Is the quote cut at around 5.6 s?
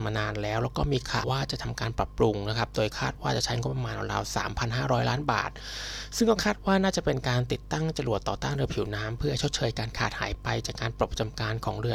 no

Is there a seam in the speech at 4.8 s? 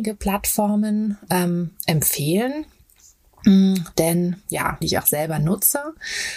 yes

